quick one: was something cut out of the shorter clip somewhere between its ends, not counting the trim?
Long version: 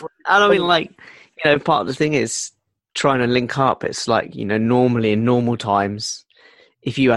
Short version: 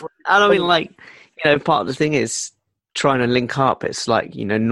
no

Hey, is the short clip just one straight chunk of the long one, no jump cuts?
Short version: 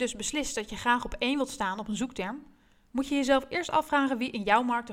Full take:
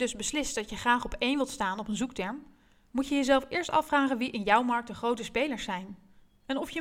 yes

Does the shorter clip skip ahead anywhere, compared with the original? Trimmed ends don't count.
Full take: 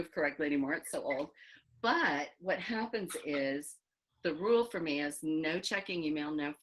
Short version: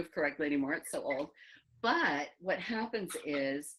no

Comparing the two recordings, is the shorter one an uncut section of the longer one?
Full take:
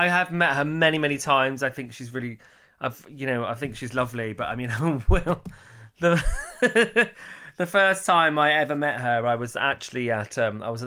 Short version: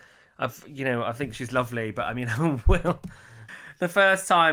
no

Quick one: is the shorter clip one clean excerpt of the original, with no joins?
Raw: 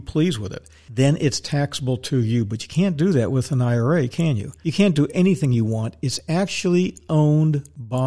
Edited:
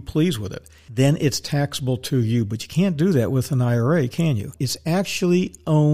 no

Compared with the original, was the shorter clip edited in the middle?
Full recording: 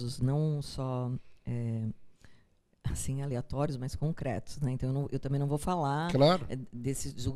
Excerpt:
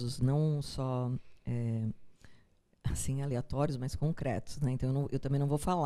no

